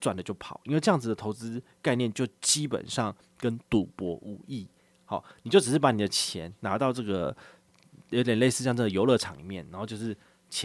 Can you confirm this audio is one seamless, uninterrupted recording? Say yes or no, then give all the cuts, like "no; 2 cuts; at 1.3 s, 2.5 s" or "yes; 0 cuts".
yes; 0 cuts